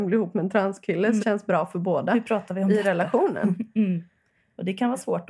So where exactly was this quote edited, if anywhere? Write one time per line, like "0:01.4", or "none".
0:01.2